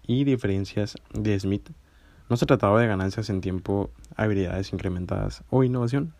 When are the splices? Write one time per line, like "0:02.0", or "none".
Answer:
none